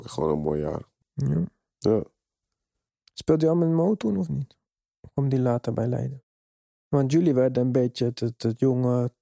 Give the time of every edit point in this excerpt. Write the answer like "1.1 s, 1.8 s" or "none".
1.0 s

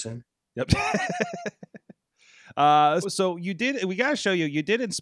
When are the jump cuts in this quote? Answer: 3.0 s

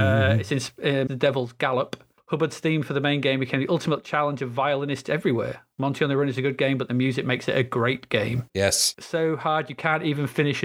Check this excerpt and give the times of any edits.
1.1 s, 8.5 s

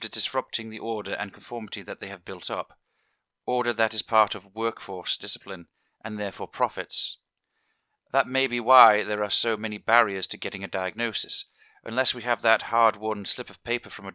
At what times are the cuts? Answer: none

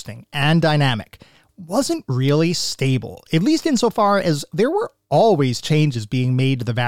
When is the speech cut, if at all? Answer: none

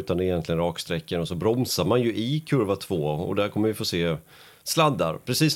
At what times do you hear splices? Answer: none

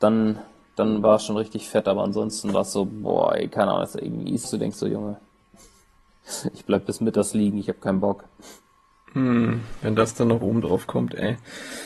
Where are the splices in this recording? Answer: 4.4 s

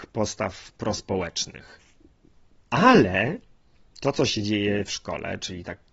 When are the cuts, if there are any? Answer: 2.6 s

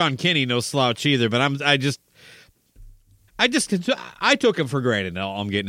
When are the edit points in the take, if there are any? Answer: 3.3 s

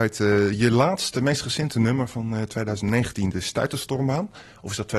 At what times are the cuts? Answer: 3.3 s

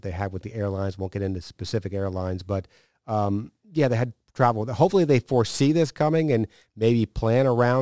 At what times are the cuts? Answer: none

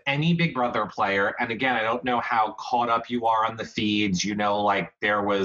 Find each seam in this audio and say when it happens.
none

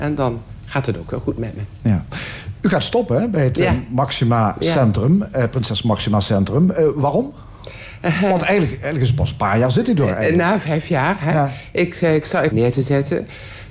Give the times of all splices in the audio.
12.5 s

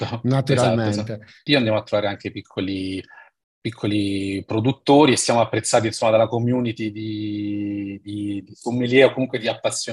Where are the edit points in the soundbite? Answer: 1.5 s

